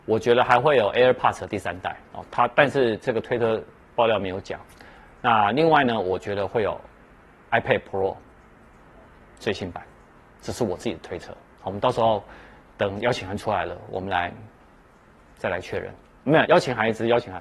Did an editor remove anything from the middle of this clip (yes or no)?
yes